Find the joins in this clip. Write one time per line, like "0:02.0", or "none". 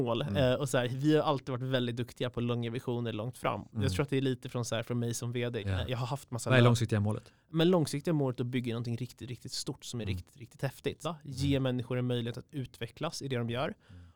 0:05.6
0:11.0